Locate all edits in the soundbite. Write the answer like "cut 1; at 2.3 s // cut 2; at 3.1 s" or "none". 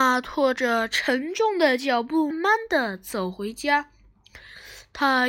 cut 1; at 2.3 s

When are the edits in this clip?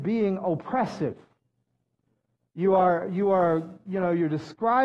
none

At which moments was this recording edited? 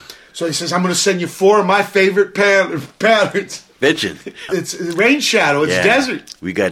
cut 1; at 4.5 s

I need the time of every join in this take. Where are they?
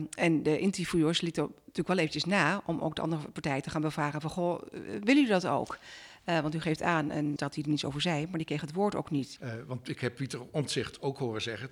cut 1; at 7.4 s // cut 2; at 9.4 s

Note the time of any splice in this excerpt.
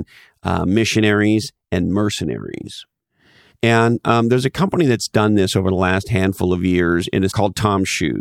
cut 1; at 3.5 s // cut 2; at 7.3 s

